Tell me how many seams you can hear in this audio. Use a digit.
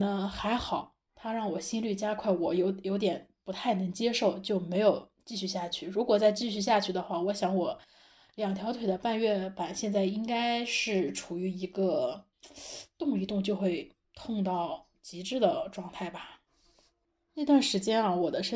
0